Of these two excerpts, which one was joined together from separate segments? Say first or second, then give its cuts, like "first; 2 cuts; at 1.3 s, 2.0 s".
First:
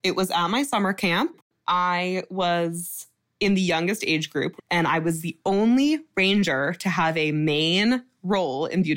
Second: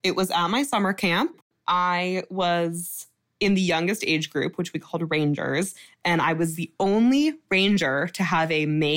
first; 1 cut; at 4.6 s